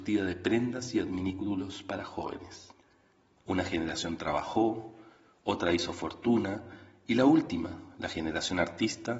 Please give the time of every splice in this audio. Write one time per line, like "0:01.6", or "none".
0:03.4